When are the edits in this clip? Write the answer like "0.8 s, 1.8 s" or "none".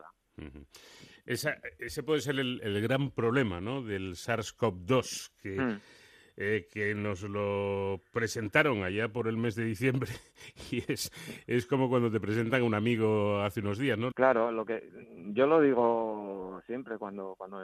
14.1 s

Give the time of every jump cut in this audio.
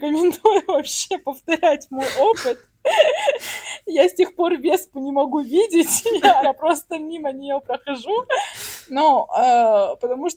6.4 s

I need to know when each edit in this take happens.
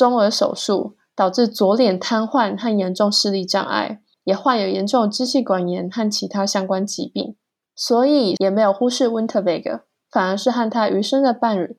4.1 s, 8.4 s

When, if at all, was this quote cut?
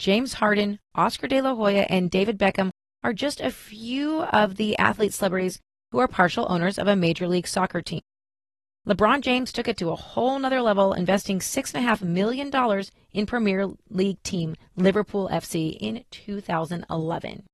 none

